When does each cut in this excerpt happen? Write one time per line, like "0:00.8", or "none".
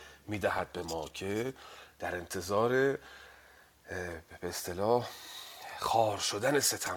none